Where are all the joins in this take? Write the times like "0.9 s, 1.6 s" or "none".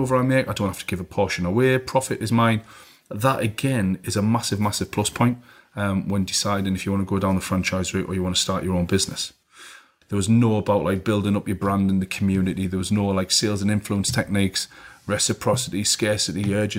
10.0 s